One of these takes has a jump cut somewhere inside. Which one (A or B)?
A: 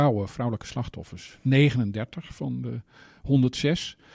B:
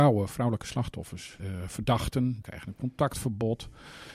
B